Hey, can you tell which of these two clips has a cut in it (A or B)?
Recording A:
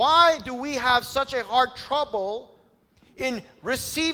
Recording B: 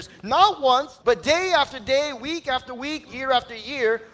B